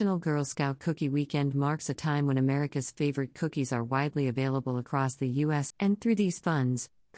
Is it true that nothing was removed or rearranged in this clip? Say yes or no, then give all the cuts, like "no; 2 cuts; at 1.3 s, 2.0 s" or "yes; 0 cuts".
no; 1 cut; at 5.7 s